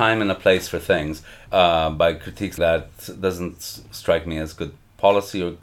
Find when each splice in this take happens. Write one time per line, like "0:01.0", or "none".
0:01.5
0:02.6

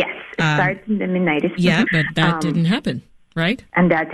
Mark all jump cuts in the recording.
0:01.9

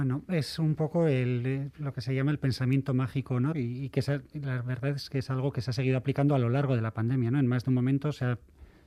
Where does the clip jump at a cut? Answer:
0:03.5

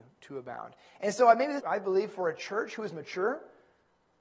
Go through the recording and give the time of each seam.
0:01.6

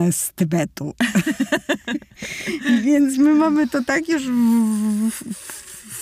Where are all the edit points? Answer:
none

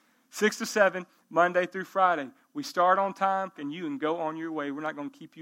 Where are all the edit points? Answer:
0:03.6

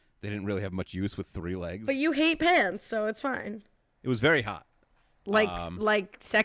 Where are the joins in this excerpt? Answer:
0:03.9

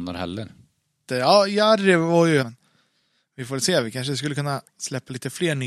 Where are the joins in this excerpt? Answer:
0:01.1
0:02.4

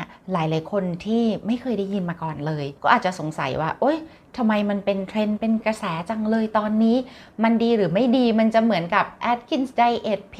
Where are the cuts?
0:02.8

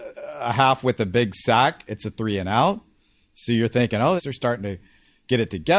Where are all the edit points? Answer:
0:04.2

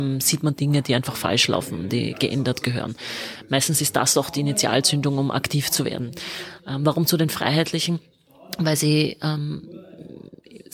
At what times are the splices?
none

